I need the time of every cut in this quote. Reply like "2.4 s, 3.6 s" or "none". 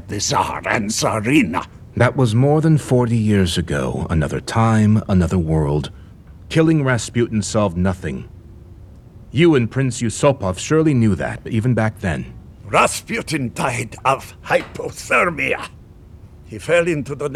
none